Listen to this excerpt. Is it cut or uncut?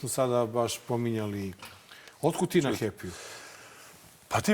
uncut